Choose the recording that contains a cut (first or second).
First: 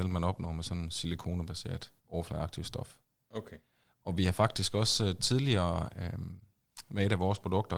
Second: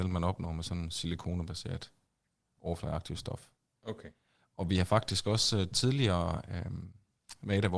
first